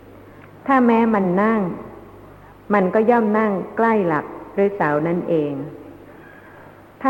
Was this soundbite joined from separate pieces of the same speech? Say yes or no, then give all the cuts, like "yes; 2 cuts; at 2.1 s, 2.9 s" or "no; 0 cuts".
no; 0 cuts